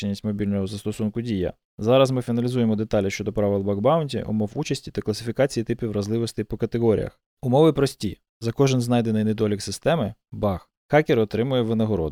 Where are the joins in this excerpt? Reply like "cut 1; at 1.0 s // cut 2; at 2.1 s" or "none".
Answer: cut 1; at 7.3 s